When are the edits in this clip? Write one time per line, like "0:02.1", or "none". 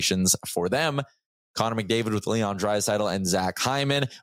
none